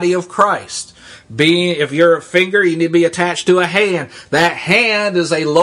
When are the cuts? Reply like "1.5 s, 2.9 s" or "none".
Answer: none